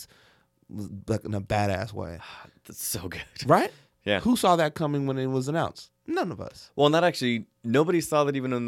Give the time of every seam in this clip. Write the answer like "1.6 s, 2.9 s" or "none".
none